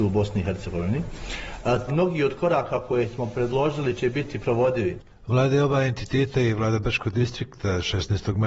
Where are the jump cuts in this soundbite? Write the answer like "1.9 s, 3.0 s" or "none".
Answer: 1.9 s